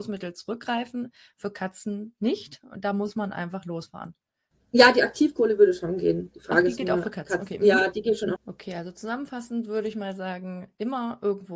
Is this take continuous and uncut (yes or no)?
no